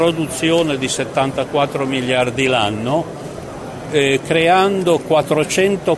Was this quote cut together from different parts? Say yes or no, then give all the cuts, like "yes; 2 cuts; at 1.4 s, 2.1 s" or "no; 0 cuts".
no; 0 cuts